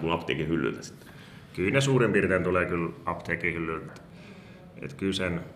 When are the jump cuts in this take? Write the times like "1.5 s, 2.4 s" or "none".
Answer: 3.9 s